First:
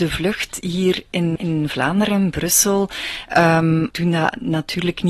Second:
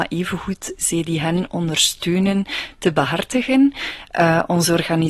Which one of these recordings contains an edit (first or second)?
first